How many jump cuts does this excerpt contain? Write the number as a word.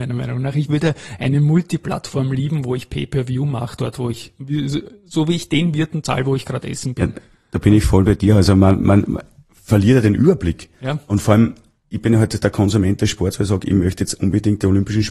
zero